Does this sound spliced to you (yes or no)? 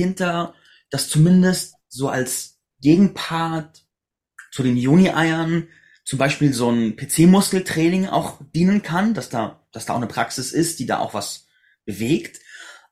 no